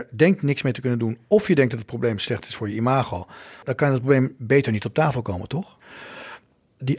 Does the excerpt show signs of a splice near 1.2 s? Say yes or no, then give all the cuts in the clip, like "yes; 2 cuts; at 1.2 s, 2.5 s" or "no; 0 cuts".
no; 1 cut; at 3.6 s